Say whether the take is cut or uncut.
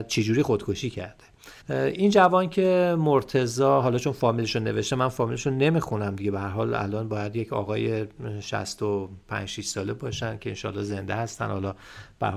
cut